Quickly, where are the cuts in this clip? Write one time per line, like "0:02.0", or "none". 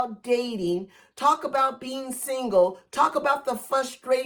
none